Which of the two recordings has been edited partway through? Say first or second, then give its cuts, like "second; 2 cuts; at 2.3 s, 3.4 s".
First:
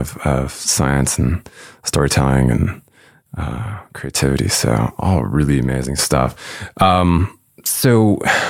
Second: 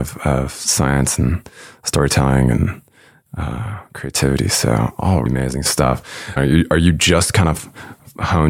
second; 2 cuts; at 5.3 s, 6.4 s